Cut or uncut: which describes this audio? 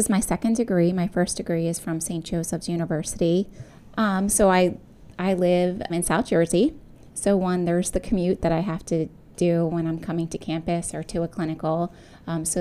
cut